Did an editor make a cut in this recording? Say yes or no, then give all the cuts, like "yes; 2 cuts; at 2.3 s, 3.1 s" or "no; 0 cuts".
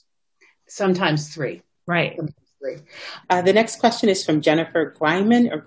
yes; 2 cuts; at 1.8 s, 3.2 s